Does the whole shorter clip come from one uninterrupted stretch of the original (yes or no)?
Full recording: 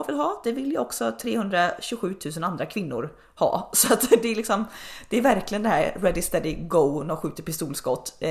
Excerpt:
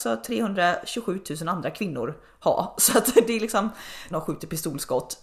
no